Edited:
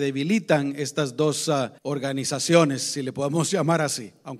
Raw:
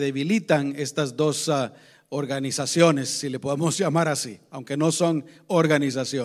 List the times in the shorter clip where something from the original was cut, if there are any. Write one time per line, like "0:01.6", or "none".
0:01.8